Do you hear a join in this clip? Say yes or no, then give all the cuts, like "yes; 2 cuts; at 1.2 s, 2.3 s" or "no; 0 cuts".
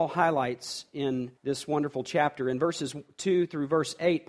yes; 1 cut; at 1.4 s